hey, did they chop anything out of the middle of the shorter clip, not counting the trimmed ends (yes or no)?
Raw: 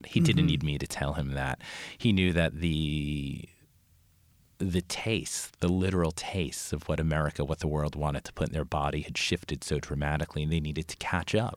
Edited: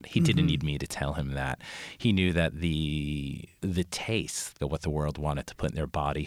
yes